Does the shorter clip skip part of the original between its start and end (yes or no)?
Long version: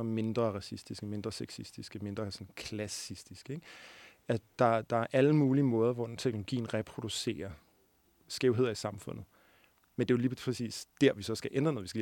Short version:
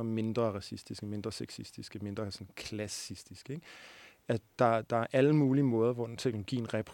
no